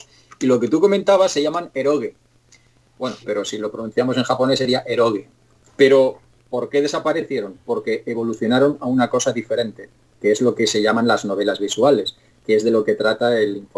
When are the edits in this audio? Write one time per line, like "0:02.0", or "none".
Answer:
0:03.2
0:05.7